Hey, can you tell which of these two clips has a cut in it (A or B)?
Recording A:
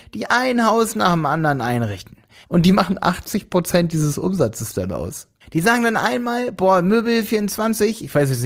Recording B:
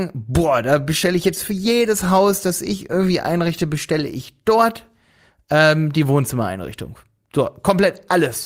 A